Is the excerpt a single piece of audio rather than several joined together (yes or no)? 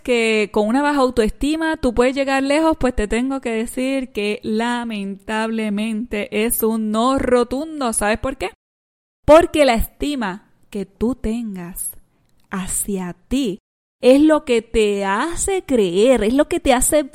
yes